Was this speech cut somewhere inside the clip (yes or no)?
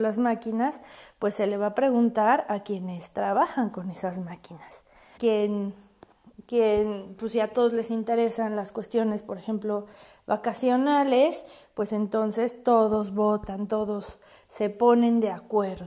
yes